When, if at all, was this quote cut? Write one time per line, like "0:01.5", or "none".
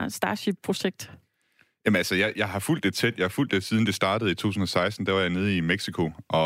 none